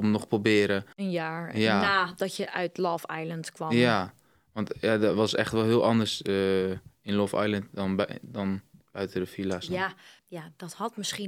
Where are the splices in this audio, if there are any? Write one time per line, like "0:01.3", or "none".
0:10.2